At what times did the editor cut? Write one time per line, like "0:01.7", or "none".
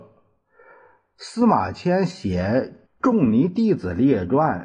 0:02.9